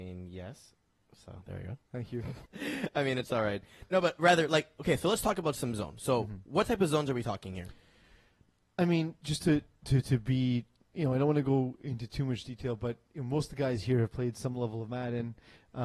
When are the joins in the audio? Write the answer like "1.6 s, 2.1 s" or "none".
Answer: 2.5 s